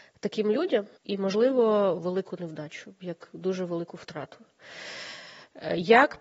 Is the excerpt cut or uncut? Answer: cut